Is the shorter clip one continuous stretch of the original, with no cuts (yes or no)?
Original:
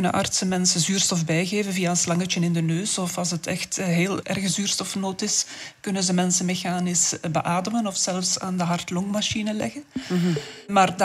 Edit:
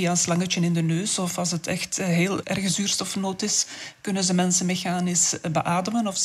yes